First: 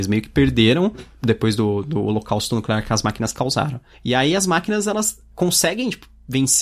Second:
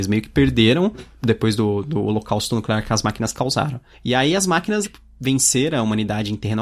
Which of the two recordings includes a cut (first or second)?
second